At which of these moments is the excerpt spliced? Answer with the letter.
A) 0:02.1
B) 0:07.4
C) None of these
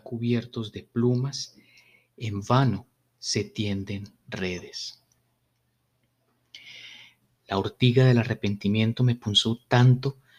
B